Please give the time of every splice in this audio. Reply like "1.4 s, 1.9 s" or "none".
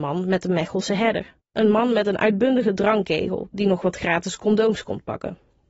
1.4 s